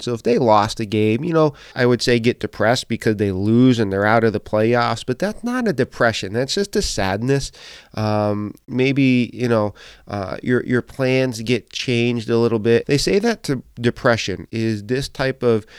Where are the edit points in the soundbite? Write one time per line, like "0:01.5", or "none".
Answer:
0:01.7
0:12.8
0:14.5

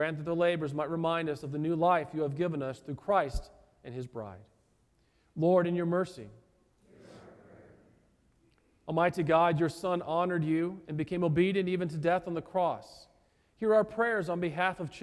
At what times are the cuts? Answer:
none

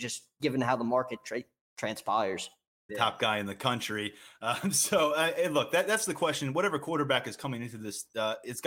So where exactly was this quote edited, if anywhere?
0:02.9

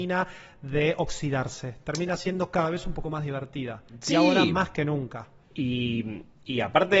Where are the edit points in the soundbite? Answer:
none

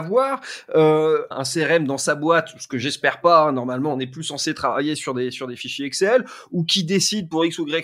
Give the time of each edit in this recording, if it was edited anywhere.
0:01.3

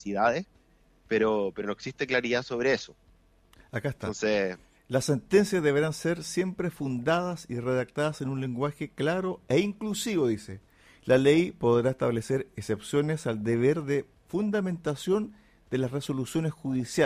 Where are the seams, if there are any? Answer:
none

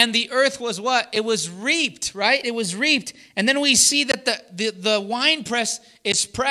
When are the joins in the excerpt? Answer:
none

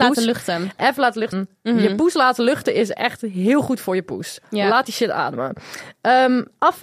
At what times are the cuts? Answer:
0:01.3

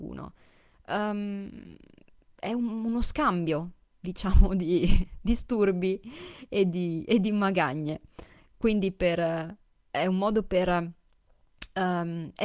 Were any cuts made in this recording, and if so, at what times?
none

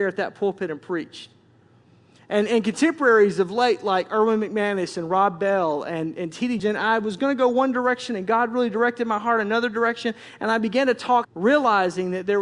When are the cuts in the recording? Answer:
0:06.6
0:11.2

